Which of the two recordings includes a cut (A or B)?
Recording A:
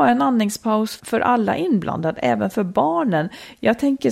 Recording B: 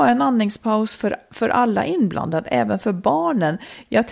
A